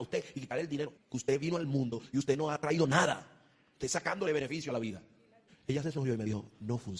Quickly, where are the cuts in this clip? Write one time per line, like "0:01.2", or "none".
0:00.9
0:05.5